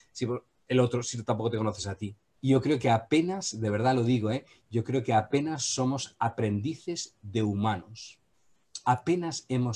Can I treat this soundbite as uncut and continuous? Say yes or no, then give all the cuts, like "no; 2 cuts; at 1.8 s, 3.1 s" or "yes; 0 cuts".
no; 1 cut; at 2.4 s